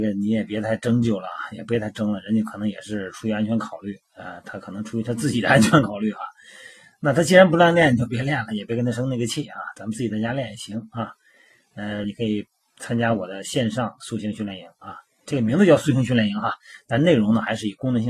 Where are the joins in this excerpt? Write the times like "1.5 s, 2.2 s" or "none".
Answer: 12.0 s